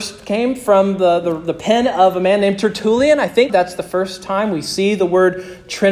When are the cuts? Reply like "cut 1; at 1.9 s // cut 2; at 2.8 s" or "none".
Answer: cut 1; at 3.5 s